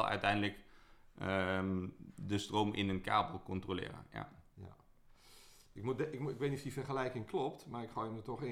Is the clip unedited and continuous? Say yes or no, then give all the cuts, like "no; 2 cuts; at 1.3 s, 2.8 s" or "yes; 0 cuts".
yes; 0 cuts